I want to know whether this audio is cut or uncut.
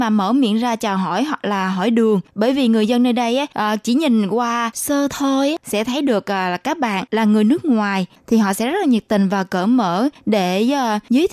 uncut